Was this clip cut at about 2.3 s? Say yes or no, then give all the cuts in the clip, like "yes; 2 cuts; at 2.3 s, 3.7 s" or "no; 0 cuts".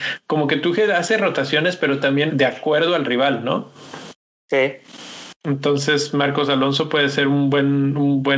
yes; 1 cut; at 2.3 s